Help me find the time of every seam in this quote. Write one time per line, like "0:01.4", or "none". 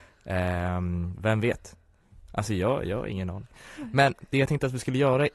none